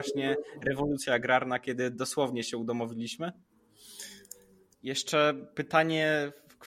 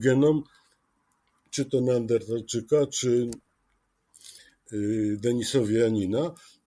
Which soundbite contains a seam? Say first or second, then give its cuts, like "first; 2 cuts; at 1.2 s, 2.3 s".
first; 1 cut; at 4.7 s